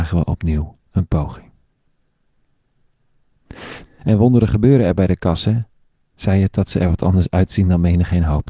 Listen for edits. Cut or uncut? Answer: cut